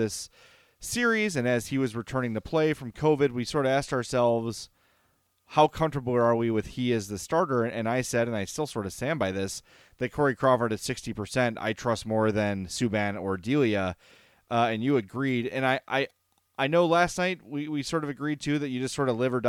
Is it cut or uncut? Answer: uncut